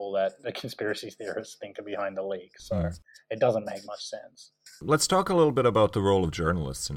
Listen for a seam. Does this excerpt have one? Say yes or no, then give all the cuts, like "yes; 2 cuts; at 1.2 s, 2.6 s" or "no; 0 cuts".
no; 0 cuts